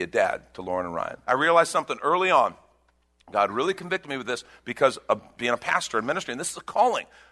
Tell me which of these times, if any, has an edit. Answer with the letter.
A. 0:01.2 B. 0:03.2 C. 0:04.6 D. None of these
A